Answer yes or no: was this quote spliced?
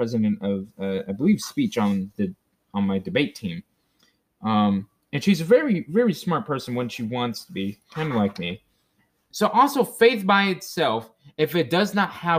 yes